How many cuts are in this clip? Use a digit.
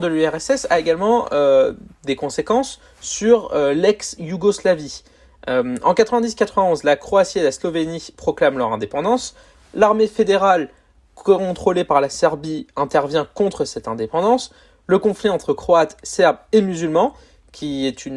0